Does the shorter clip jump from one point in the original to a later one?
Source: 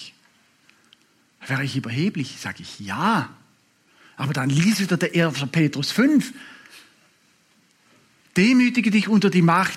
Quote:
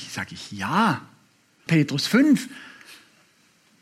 yes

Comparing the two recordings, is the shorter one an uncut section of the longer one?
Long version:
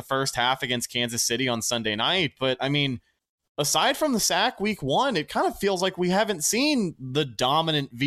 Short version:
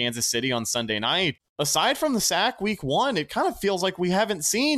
no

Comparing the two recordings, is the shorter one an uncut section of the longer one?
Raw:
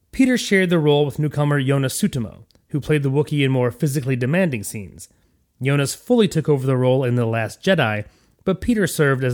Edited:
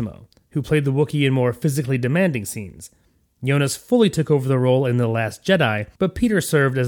no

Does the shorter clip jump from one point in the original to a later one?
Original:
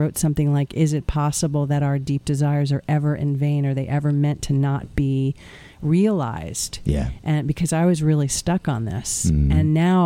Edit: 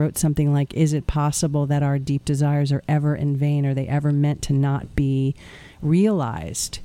no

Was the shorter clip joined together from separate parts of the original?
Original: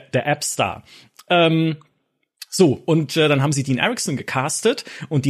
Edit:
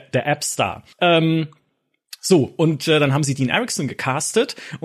yes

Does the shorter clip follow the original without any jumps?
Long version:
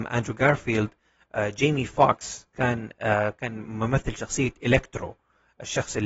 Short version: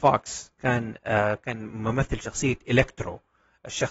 yes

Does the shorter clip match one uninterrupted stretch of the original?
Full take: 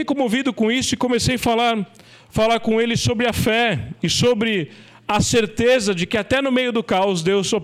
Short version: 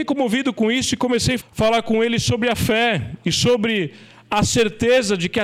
no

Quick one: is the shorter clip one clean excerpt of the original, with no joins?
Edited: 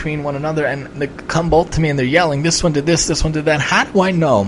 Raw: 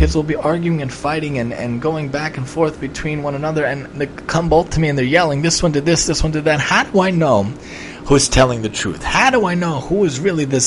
yes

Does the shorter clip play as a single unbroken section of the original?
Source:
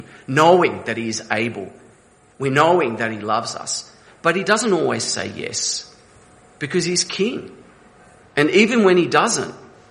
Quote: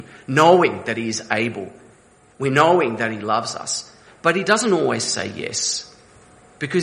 yes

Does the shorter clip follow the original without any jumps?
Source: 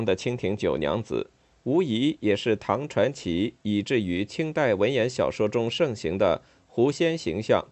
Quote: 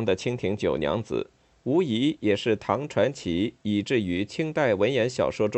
yes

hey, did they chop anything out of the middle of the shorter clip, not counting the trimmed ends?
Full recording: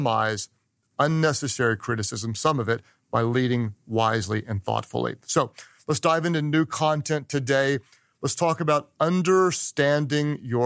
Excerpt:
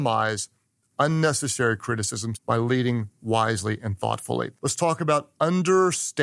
yes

